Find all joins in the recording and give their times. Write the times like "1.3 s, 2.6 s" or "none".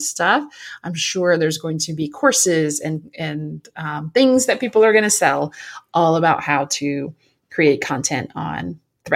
none